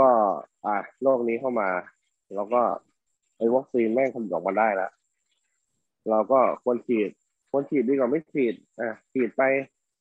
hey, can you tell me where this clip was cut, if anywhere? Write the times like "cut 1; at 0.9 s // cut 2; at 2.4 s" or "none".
none